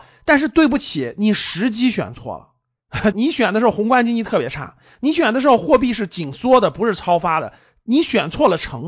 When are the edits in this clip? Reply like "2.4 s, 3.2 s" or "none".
3.1 s